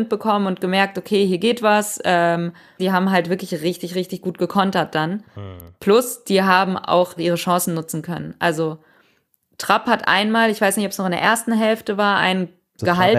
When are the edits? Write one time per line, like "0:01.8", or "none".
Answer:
0:02.8
0:07.2